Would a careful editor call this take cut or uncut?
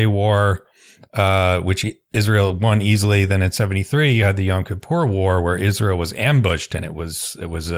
uncut